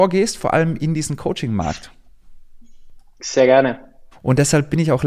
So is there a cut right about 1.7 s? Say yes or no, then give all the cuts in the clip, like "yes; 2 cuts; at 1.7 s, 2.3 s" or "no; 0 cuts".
no; 1 cut; at 4.1 s